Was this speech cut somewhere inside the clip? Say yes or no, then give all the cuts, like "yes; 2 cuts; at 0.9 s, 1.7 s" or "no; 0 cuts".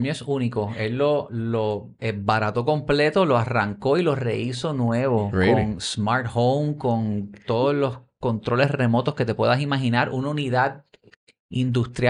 no; 0 cuts